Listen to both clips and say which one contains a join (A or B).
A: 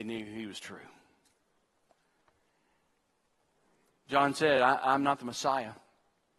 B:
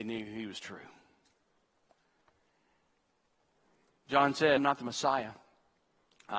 B